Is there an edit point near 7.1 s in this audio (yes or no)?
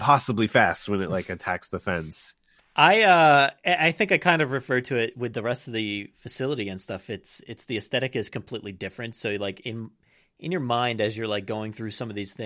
no